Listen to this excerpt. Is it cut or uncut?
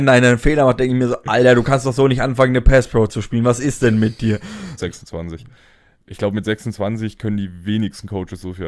cut